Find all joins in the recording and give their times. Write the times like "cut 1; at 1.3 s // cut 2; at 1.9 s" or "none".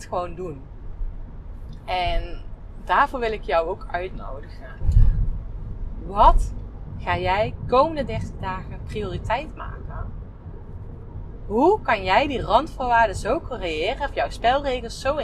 none